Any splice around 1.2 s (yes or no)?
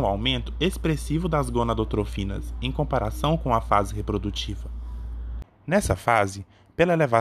no